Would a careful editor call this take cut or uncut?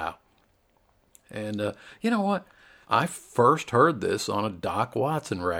cut